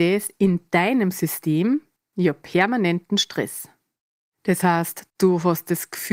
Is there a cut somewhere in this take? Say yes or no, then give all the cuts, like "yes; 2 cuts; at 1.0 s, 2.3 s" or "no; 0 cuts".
yes; 1 cut; at 5.1 s